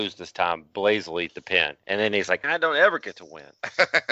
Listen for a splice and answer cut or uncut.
cut